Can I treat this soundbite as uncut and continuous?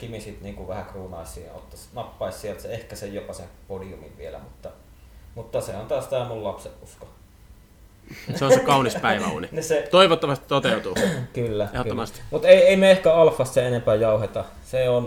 yes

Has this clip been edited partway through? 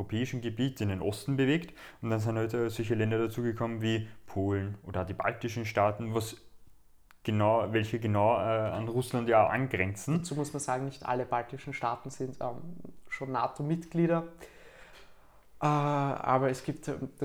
no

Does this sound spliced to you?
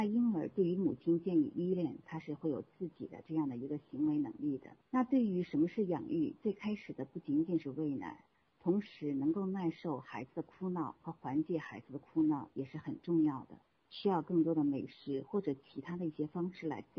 yes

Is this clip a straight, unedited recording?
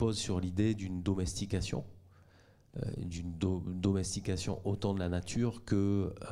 yes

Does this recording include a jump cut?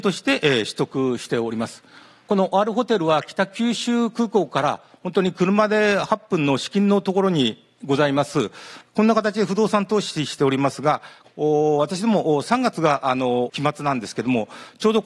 yes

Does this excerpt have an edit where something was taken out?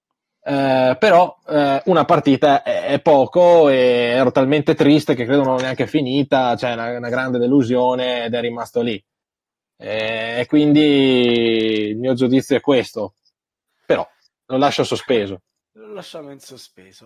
no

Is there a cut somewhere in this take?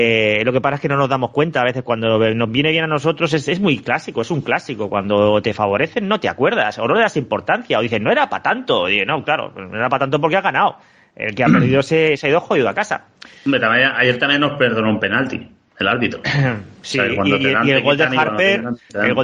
no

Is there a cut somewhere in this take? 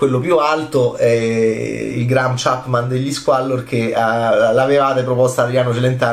no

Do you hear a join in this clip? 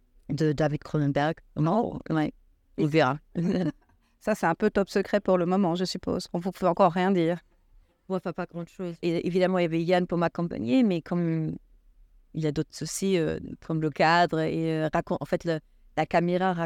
yes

